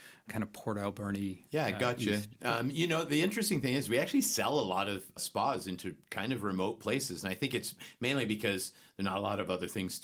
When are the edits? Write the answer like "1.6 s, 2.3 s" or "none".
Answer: none

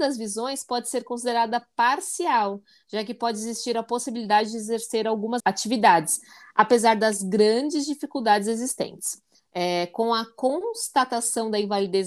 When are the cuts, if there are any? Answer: 5.4 s, 9.3 s

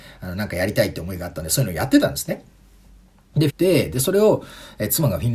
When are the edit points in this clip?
3.5 s

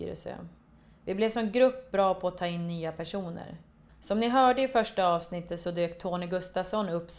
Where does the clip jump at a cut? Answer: 3.9 s

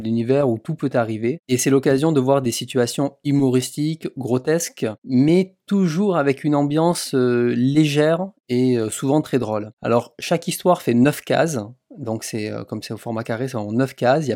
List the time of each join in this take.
none

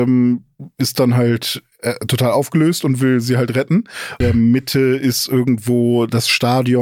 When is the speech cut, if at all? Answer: 4.2 s

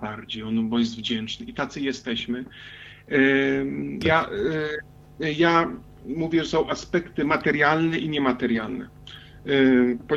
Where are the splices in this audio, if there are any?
4.0 s

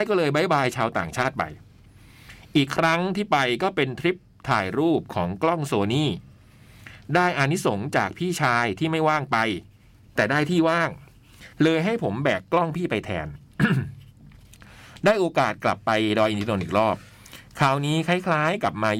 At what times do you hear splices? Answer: 11.5 s

